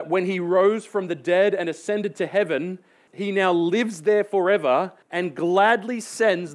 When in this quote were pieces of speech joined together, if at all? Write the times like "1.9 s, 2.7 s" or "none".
3.1 s, 5.0 s